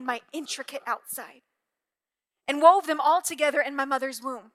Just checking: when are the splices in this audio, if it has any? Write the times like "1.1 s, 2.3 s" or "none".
none